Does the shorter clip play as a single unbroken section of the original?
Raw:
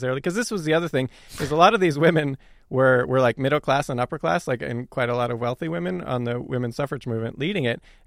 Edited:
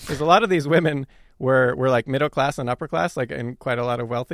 yes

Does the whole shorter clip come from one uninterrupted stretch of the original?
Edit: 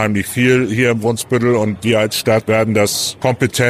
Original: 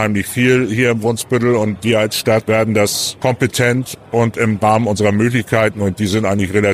yes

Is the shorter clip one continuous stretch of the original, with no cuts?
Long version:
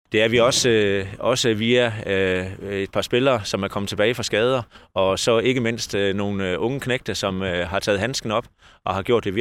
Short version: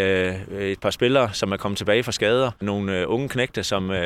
no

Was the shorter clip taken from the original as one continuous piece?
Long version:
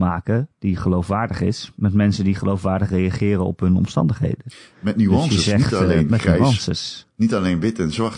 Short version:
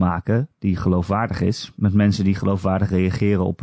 yes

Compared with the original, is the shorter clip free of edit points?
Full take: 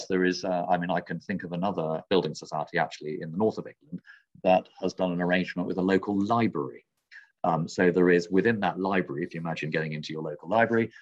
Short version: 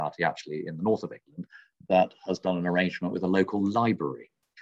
yes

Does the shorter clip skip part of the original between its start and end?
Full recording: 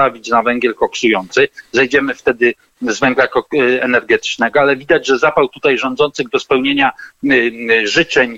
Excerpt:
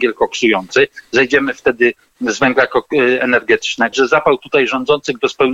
yes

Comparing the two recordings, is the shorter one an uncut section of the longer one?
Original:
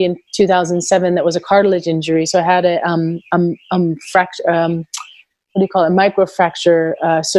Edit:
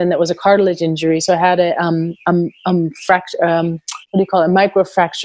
no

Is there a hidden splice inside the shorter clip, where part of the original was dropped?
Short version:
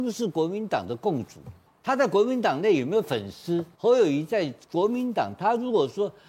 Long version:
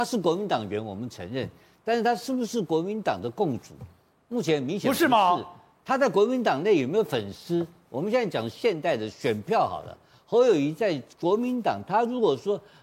yes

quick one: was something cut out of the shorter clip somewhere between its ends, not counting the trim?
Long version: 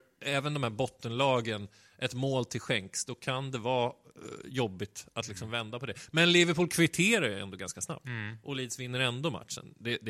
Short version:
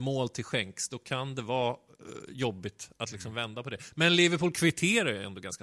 no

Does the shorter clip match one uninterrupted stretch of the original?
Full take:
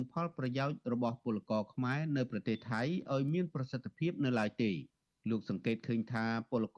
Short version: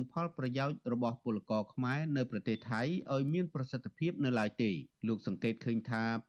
no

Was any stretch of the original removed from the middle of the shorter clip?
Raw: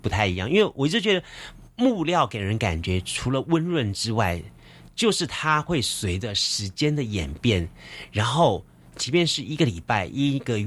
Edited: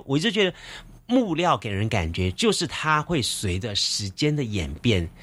yes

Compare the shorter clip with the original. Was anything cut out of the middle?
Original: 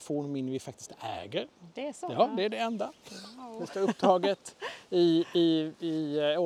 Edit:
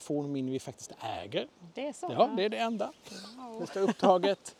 no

